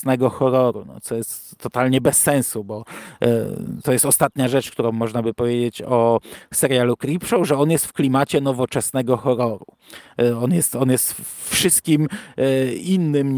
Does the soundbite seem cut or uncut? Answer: uncut